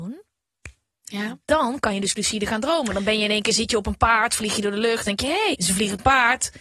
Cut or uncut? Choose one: cut